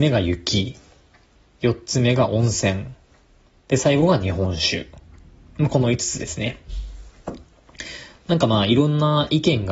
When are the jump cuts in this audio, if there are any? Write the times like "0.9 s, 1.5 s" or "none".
none